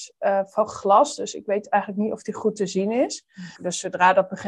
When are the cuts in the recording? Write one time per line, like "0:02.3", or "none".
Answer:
0:03.5